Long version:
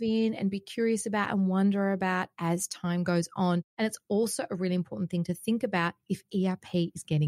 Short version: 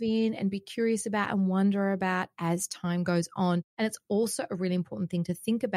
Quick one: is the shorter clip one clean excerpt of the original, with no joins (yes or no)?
yes